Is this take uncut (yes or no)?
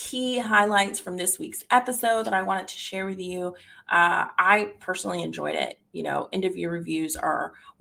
yes